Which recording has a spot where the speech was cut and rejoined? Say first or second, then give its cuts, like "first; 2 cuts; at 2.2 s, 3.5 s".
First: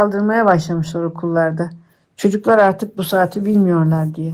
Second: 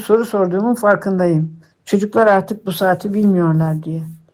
second; 1 cut; at 1.7 s